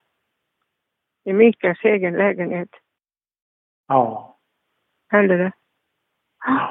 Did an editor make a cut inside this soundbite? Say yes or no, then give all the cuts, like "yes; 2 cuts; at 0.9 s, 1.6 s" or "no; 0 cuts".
no; 0 cuts